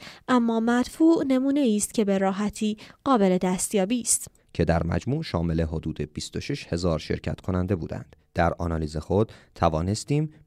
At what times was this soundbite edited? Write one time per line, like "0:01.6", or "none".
0:04.4

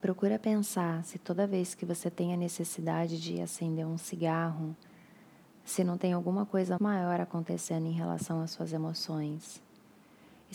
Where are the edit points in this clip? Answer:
0:06.8

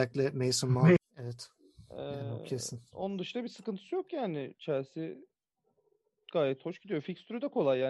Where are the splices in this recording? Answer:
0:01.0

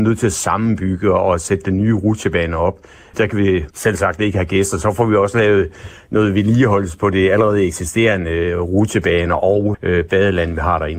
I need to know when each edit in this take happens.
0:09.7

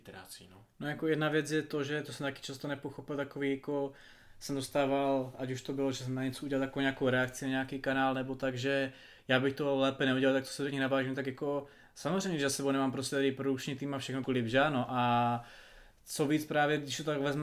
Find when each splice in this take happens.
0:14.2

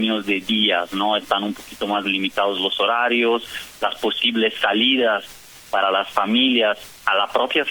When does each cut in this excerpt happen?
none

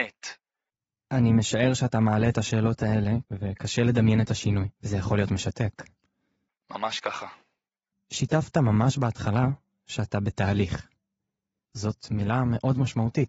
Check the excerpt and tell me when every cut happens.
0:03.2
0:04.7

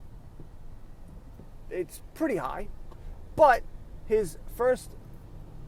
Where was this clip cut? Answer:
none

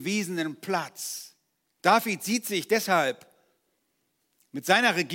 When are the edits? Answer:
0:01.8

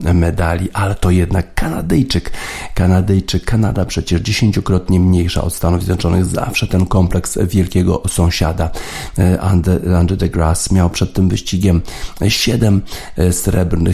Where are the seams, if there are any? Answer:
none

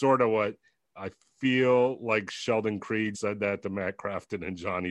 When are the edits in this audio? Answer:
0:03.1

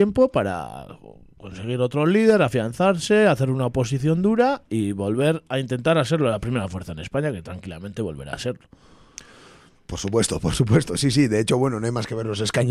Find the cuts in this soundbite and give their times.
none

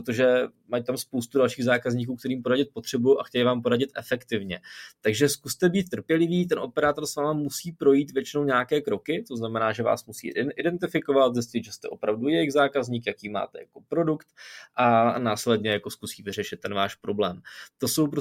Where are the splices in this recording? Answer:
none

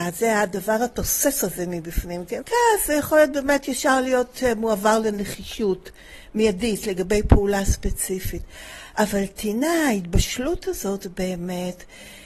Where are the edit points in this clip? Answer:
0:02.4

